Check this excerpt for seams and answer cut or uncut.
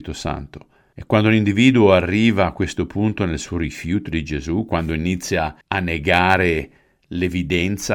cut